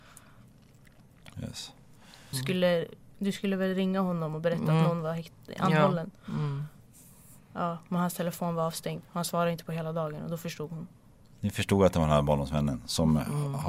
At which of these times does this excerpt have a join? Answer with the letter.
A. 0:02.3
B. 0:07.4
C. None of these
A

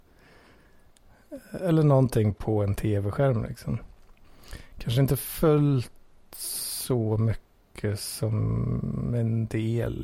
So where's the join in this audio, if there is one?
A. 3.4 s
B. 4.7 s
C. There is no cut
A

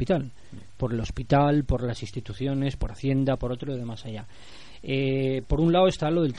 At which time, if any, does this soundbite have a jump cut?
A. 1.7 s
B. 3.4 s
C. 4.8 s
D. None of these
B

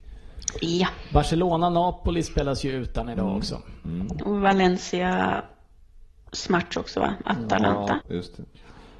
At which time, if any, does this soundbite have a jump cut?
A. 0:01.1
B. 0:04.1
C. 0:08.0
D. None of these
C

